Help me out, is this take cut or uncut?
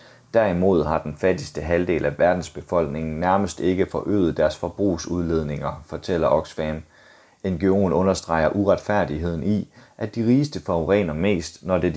uncut